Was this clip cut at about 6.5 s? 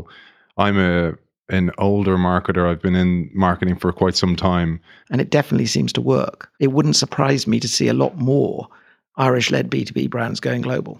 yes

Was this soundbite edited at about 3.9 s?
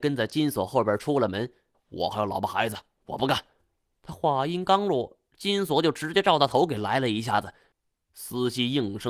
no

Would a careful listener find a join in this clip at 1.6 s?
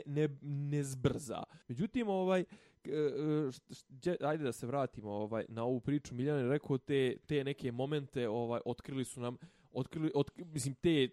yes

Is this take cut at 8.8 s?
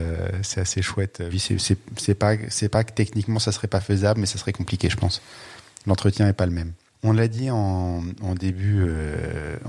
no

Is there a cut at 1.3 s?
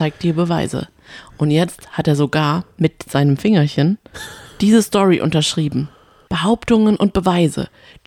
no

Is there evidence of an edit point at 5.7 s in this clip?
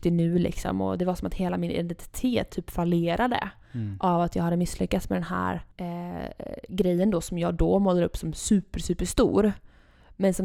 yes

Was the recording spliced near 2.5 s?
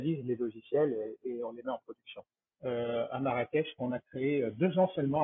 yes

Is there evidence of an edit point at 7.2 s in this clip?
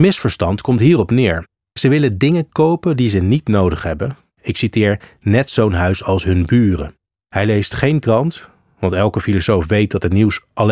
yes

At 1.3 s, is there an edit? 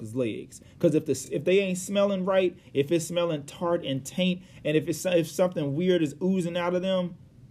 no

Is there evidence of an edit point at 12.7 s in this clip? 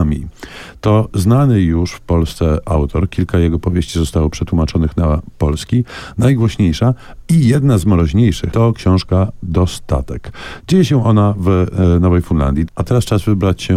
yes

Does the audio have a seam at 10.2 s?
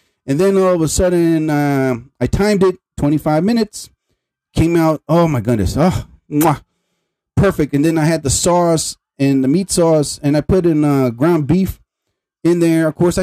no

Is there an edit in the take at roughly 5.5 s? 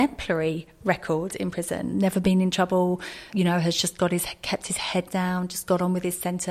no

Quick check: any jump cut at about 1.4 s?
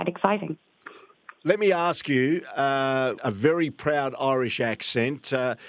no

